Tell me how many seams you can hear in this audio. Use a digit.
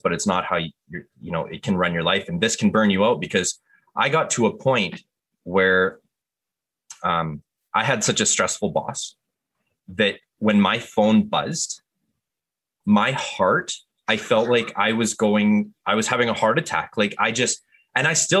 1